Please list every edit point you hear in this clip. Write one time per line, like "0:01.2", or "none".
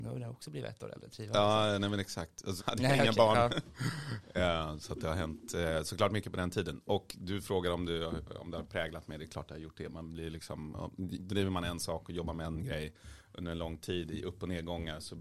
0:02.6